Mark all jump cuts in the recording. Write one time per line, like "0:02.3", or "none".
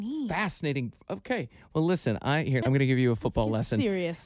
0:02.6